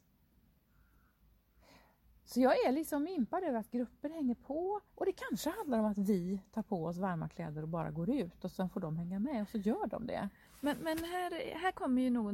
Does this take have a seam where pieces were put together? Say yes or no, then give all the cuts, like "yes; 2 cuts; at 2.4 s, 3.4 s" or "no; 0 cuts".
yes; 1 cut; at 4.9 s